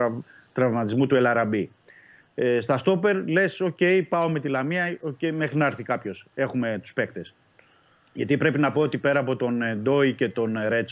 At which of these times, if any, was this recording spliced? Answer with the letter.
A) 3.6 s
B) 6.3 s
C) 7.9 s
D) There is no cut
D